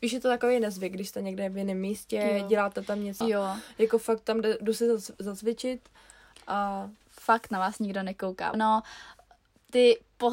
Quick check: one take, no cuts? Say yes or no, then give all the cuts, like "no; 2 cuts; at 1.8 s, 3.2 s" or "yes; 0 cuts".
no; 3 cuts; at 3.2 s, 7.0 s, 8.5 s